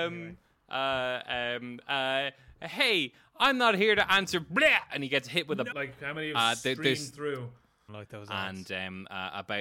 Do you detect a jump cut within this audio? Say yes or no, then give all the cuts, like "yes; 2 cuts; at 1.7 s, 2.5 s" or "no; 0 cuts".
yes; 2 cuts; at 5.7 s, 7.9 s